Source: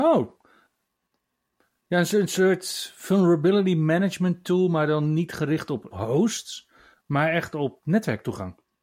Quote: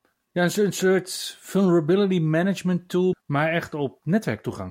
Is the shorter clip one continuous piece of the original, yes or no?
no